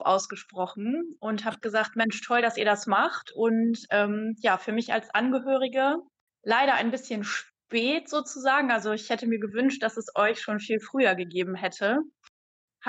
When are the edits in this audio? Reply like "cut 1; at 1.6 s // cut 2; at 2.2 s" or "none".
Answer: none